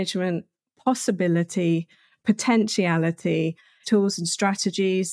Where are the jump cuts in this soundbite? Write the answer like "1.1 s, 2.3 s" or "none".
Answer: 3.8 s

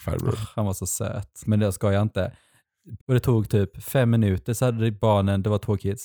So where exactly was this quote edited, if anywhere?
1.4 s, 3.0 s

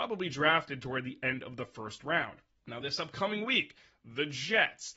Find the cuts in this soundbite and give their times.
none

